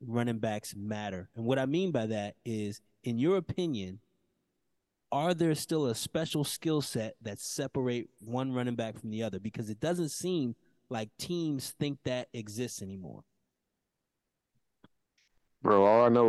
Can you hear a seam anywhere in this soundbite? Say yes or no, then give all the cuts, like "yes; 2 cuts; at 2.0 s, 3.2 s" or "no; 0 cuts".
no; 0 cuts